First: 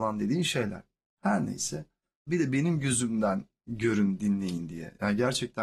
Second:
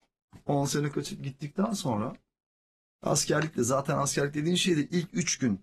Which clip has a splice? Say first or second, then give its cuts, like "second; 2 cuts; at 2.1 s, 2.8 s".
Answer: first; 1 cut; at 2.3 s